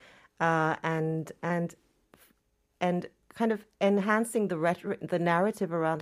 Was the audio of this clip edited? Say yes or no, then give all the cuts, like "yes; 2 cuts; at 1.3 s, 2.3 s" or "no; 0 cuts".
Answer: no; 0 cuts